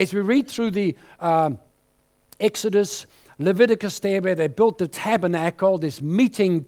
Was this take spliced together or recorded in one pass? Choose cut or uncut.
uncut